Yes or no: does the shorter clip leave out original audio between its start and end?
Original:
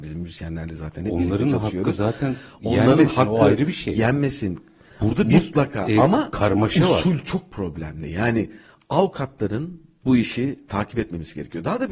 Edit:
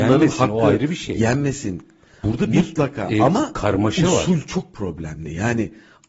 no